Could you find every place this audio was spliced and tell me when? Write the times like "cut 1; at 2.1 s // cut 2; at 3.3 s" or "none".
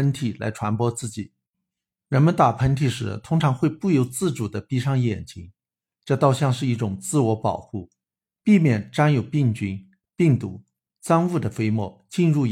none